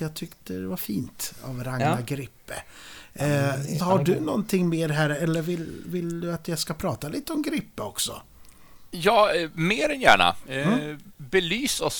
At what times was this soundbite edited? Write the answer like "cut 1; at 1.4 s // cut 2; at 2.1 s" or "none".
cut 1; at 3.8 s

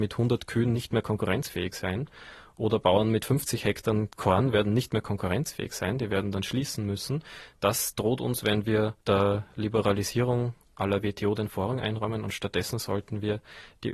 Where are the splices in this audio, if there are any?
cut 1; at 9.0 s

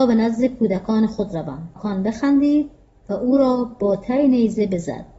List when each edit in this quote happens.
cut 1; at 1.8 s

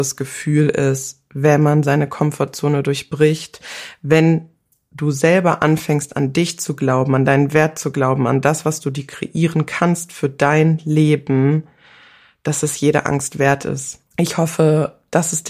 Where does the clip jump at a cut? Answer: cut 1; at 14.0 s

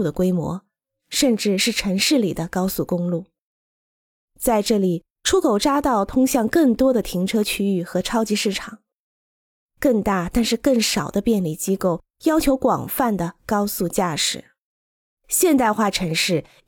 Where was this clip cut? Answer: cut 1; at 15.2 s

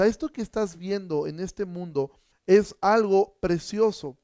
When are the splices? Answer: cut 1; at 2.3 s

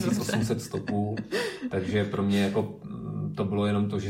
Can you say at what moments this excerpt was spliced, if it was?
none

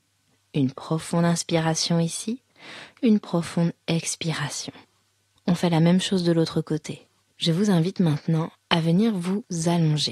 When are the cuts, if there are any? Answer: cut 1; at 5.3 s // cut 2; at 7.2 s

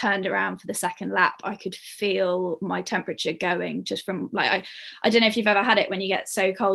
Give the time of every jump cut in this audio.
none

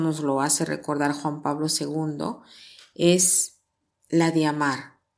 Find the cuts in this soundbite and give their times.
none

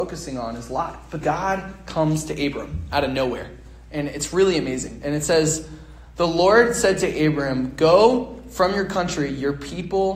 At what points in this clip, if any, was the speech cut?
cut 1; at 1.2 s

